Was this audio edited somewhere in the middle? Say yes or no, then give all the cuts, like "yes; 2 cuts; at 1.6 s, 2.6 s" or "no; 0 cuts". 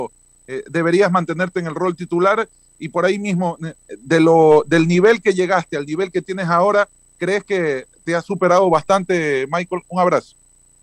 no; 0 cuts